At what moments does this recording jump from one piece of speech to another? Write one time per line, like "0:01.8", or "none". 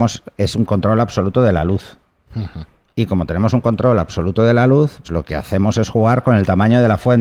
0:05.0